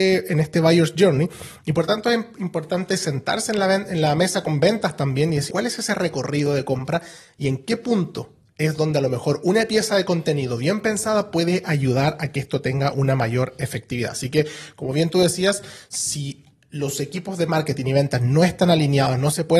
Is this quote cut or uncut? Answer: cut